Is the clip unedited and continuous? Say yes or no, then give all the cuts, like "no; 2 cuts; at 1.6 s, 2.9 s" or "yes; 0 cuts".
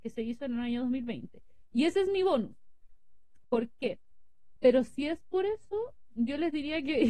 no; 2 cuts; at 3.4 s, 4.6 s